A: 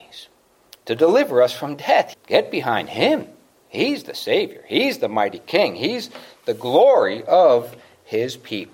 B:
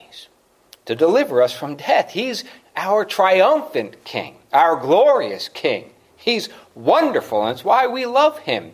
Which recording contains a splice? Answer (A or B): A